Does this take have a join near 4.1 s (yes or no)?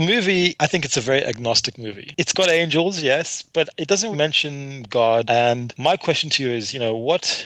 yes